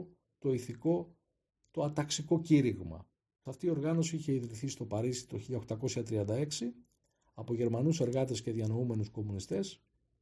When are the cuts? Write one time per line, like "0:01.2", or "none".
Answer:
0:03.5